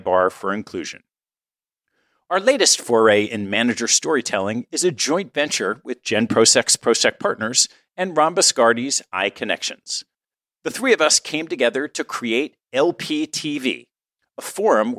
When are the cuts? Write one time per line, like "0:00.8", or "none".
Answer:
none